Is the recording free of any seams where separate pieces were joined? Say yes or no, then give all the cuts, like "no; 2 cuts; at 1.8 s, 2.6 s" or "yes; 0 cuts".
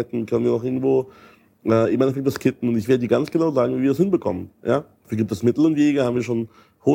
yes; 0 cuts